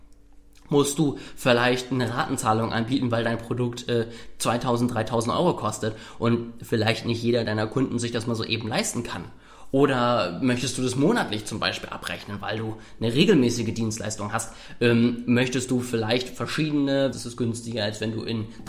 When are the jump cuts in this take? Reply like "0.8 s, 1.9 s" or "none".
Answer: 17.1 s

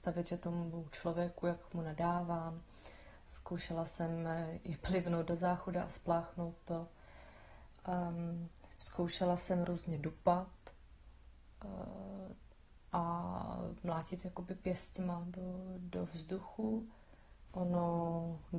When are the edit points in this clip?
17.5 s

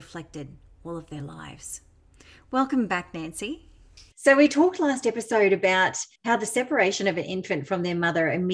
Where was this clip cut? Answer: 4.1 s, 6.1 s

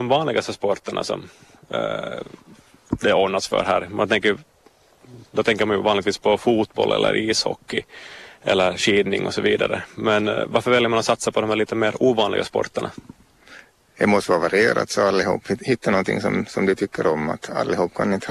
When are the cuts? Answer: none

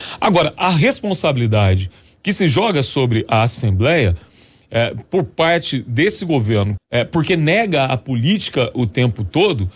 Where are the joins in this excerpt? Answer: 6.8 s

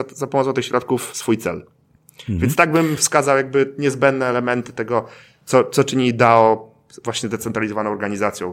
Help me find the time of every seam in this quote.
none

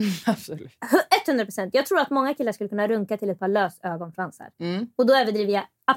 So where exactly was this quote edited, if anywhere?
none

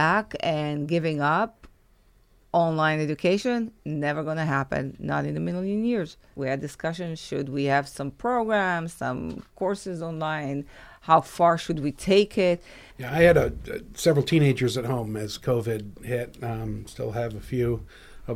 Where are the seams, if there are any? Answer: 6.4 s, 12.9 s

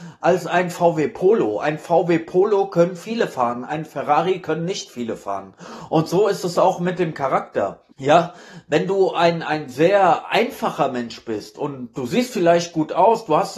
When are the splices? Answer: 7.9 s

